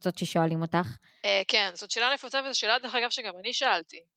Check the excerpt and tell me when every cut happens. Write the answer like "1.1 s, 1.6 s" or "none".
1.2 s